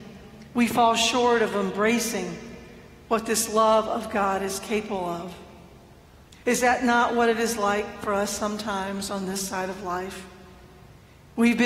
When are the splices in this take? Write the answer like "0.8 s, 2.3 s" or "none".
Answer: 6.3 s